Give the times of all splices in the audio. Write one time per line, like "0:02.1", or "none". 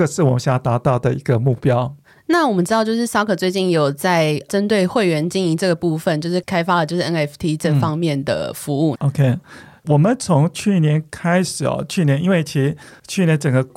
0:08.9